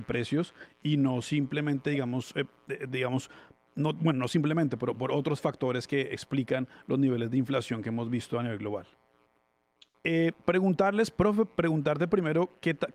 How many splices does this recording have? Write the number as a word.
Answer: one